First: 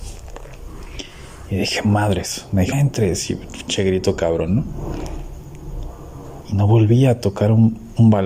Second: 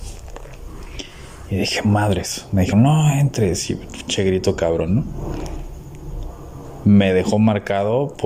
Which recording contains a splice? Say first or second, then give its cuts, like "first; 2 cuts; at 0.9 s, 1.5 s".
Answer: first; 2 cuts; at 2.7 s, 6.4 s